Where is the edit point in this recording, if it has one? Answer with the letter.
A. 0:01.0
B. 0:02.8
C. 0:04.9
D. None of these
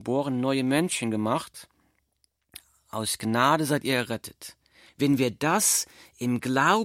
C